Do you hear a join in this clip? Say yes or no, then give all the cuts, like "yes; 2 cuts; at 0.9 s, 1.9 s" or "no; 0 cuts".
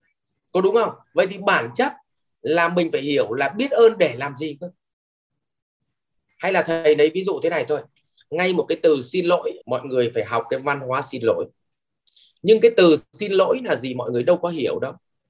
yes; 2 cuts; at 1.0 s, 9.6 s